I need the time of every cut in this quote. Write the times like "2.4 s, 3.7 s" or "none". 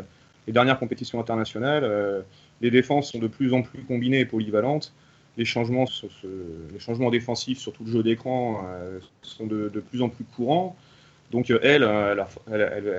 5.9 s